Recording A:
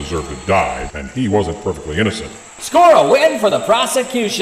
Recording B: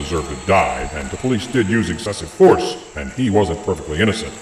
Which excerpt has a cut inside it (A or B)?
A